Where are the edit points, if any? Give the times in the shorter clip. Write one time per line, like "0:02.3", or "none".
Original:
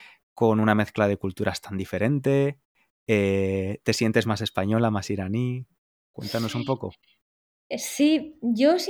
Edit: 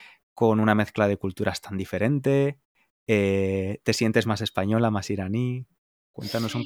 none